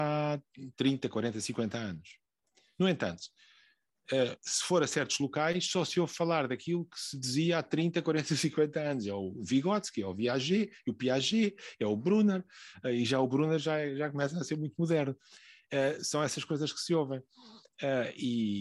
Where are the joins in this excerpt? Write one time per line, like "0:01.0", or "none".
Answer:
none